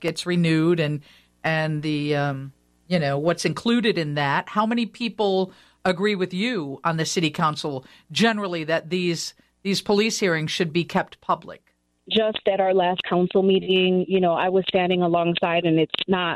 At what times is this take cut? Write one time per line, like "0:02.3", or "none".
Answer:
0:12.0